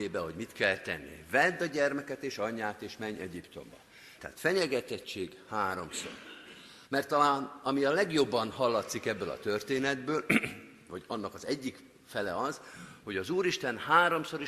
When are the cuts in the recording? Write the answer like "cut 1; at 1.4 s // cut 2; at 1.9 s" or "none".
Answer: cut 1; at 4.2 s // cut 2; at 6.9 s